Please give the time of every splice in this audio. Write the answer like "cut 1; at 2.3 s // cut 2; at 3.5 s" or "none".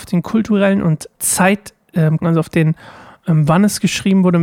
cut 1; at 1.1 s // cut 2; at 2.2 s